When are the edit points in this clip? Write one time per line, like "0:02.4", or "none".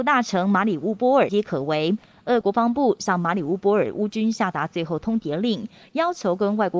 0:01.3
0:02.4

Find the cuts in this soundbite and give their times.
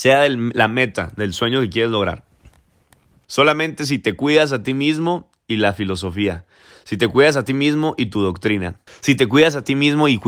0:03.2
0:08.9

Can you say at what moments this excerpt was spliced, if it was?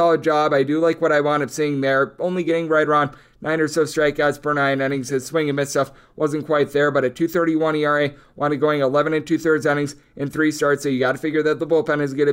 none

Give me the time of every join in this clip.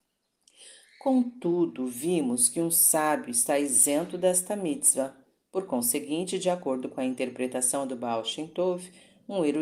none

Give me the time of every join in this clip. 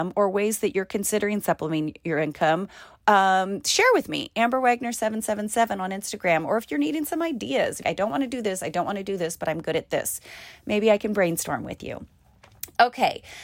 0:07.8

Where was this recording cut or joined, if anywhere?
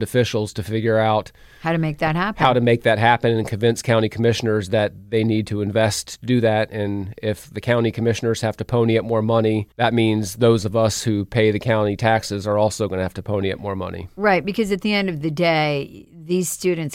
0:09.7

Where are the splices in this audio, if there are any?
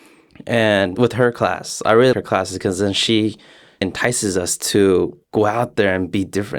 0:02.1
0:05.2

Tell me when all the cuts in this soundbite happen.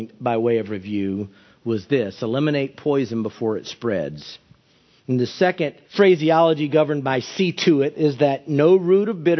0:05.9
0:07.9

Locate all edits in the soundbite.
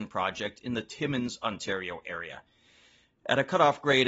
none

